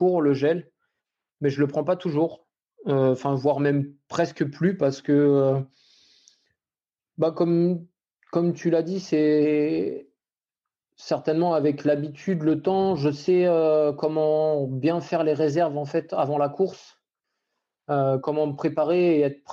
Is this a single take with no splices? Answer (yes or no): yes